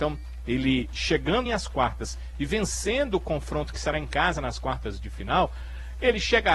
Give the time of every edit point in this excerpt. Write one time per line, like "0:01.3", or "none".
0:01.5